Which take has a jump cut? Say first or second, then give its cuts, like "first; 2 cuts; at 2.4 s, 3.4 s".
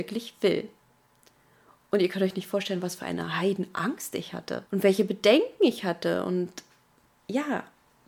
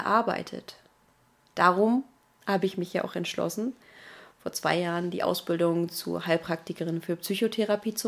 first; 1 cut; at 4.7 s